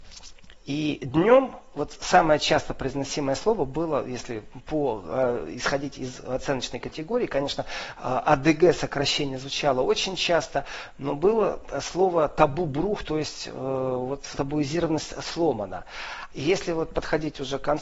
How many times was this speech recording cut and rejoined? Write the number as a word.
two